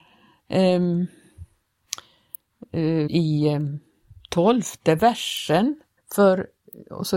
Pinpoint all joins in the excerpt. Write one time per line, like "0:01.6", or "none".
0:03.1
0:06.0